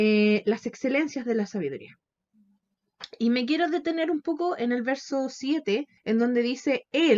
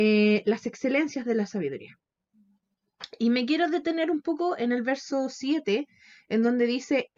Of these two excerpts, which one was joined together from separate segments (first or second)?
first